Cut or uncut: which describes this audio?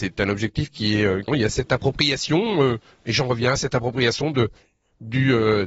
cut